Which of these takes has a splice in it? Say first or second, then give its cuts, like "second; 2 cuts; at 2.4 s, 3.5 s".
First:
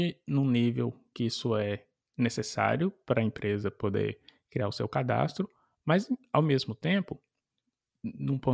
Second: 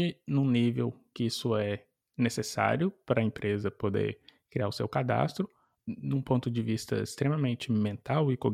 second; 1 cut; at 5.8 s